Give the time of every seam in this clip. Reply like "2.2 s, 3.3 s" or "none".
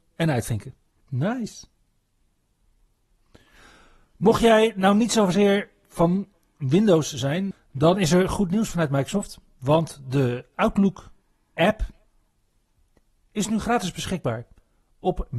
1.0 s, 7.5 s